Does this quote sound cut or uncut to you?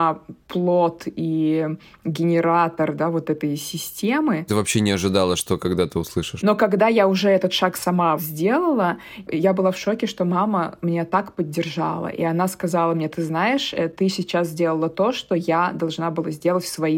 cut